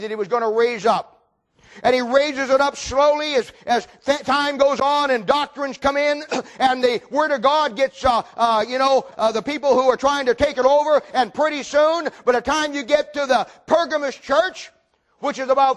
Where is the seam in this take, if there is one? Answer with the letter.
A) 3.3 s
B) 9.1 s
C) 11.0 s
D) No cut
B